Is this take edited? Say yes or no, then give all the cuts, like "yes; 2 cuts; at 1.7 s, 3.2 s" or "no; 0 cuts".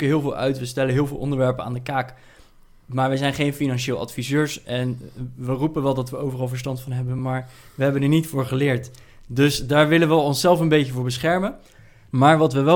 no; 0 cuts